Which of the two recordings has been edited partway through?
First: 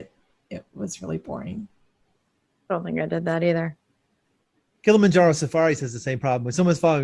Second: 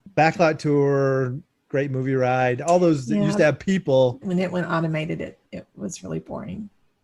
second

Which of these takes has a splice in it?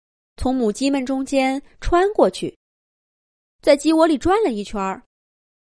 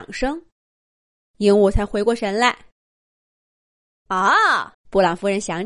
second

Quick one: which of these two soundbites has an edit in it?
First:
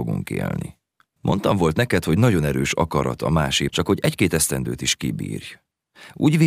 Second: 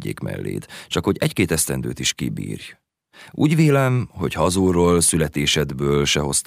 first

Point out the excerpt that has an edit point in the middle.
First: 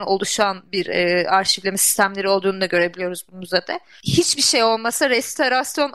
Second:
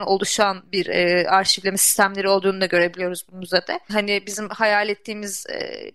second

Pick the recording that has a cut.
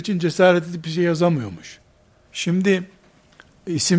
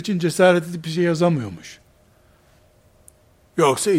first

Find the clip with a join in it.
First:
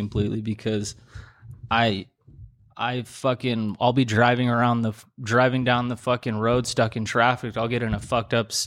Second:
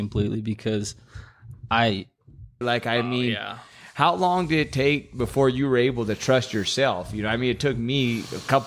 second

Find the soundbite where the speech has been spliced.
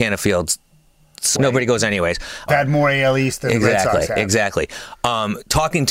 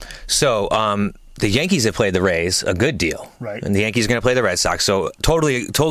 first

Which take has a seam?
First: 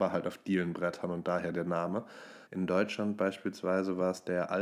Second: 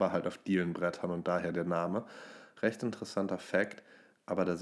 first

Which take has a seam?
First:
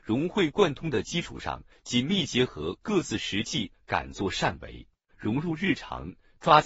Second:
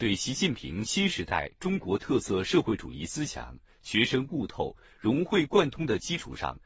first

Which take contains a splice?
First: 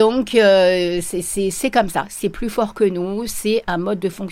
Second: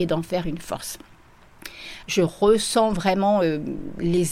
second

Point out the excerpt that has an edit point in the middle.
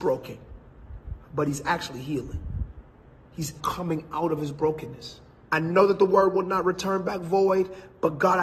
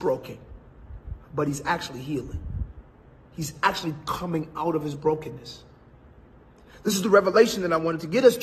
first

